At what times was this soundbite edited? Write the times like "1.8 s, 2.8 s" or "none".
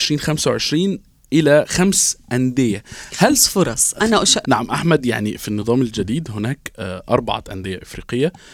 4.4 s